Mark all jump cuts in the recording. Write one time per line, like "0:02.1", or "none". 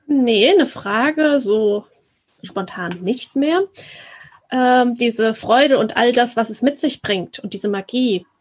none